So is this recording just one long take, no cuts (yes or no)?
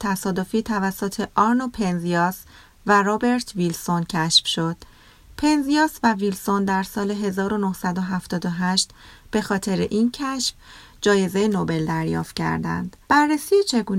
no